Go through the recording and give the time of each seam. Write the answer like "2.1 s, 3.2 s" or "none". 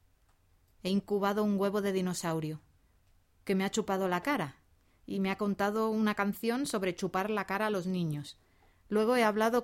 none